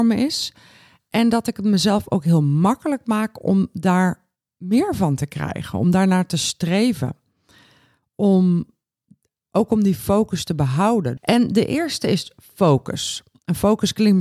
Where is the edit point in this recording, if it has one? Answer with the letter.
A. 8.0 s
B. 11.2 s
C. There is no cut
B